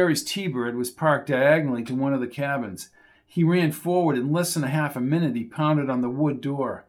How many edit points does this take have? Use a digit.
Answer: 0